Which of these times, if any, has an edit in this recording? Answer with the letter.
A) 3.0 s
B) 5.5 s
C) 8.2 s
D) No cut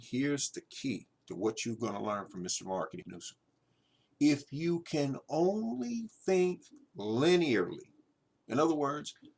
A